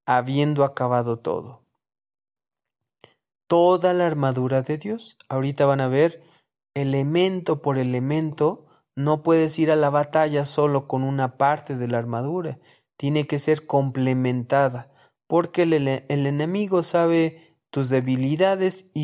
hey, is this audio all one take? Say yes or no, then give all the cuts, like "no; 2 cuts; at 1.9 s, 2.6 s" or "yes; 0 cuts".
yes; 0 cuts